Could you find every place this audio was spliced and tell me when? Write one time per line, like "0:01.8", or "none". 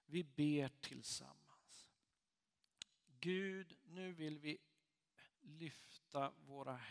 0:05.3